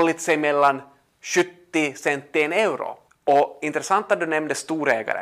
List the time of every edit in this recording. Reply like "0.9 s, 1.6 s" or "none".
3.1 s